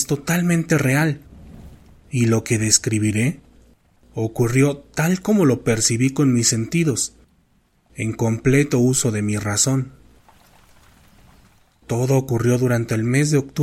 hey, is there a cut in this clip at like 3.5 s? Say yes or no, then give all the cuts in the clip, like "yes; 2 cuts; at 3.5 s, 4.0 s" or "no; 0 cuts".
no; 0 cuts